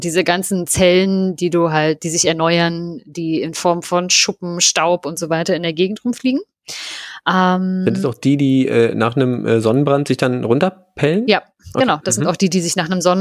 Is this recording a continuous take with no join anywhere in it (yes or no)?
yes